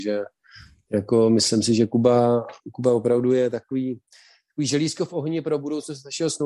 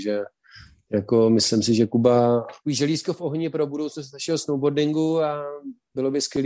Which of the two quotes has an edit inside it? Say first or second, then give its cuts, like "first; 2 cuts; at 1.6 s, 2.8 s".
second; 1 cut; at 2.6 s